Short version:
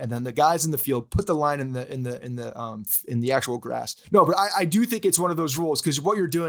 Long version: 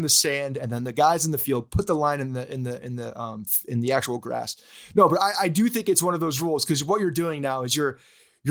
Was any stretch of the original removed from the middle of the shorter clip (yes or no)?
yes